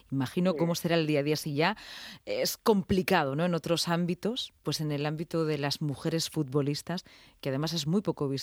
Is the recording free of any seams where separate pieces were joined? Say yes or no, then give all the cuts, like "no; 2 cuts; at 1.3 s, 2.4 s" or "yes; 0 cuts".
yes; 0 cuts